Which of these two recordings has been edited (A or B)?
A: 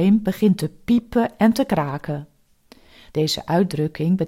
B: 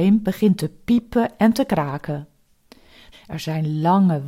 B